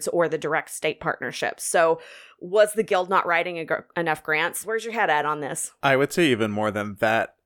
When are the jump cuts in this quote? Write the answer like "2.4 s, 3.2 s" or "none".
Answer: 4.6 s